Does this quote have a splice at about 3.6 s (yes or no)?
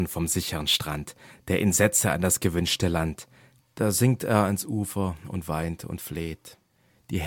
yes